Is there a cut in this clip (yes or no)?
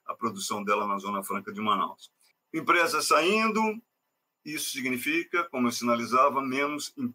no